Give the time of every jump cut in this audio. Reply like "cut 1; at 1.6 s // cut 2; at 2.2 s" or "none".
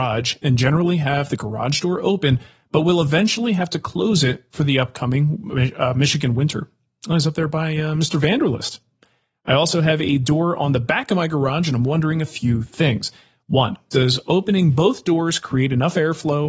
none